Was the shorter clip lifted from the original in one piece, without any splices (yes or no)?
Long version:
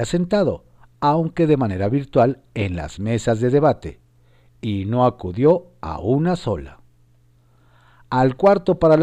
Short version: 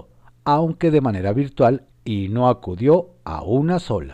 no